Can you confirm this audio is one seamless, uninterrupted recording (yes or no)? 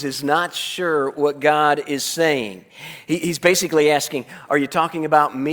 yes